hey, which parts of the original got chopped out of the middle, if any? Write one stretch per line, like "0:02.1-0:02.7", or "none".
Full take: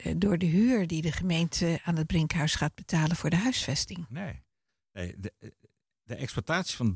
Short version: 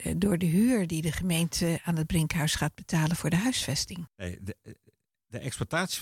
0:04.1-0:04.8